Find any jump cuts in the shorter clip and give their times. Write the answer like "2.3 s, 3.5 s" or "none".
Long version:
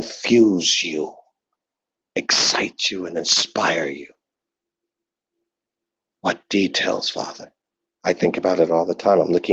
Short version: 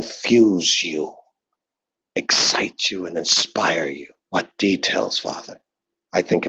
4.2 s